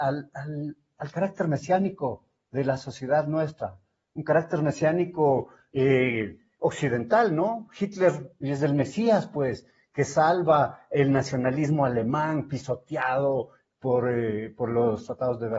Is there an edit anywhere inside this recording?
no; 0 cuts

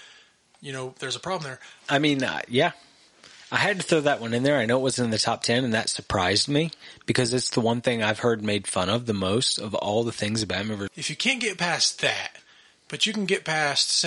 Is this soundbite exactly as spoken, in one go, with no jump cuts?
no; 2 cuts; at 1.8 s, 10.9 s

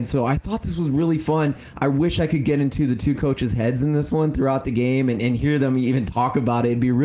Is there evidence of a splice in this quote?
no; 0 cuts

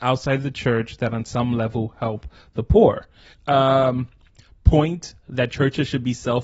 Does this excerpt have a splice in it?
yes; 1 cut; at 3.3 s

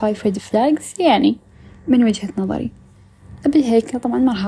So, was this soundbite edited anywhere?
no; 0 cuts

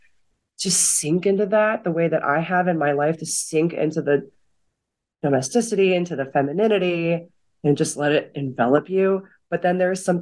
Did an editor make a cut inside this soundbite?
no; 0 cuts

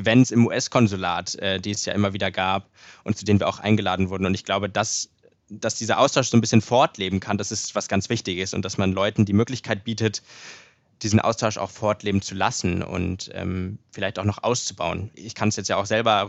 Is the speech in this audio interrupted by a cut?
no; 0 cuts

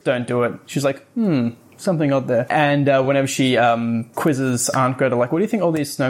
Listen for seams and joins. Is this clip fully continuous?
yes; 0 cuts

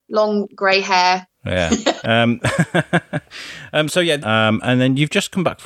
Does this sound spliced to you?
yes; 2 cuts; at 2.0 s, 4.2 s

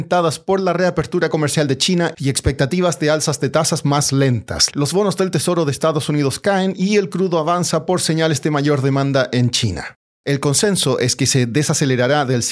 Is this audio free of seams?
no; 1 cut; at 10.2 s

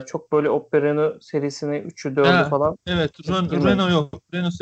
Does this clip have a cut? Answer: no; 0 cuts

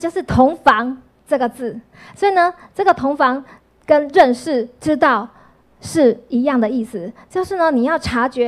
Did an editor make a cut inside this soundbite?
no; 0 cuts

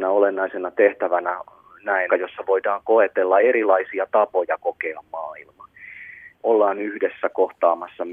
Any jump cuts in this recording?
yes; 2 cuts; at 2.1 s, 6.3 s

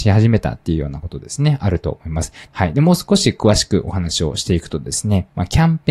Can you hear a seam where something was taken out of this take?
yes; 1 cut; at 2.5 s

